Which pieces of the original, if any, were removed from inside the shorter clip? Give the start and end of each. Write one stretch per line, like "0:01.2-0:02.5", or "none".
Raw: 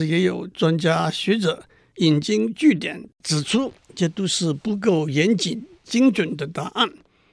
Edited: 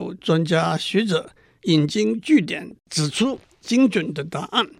0:03.8-0:05.7